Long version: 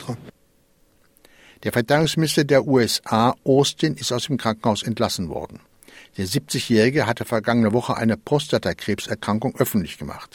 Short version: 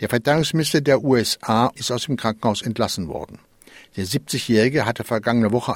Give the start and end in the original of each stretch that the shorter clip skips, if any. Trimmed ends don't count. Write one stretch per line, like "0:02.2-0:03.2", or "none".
0:03.4-0:04.0